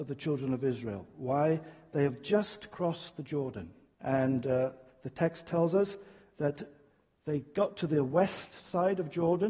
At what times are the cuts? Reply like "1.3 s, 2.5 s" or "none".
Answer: 3.9 s